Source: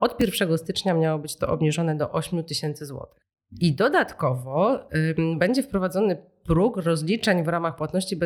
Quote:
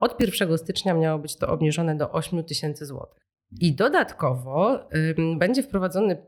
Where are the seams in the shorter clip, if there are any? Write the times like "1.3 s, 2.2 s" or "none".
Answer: none